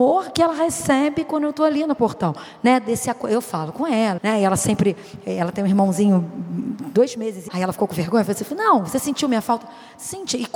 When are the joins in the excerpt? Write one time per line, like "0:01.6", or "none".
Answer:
0:04.2
0:07.5